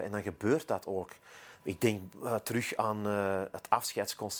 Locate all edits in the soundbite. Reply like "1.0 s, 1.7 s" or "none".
1.6 s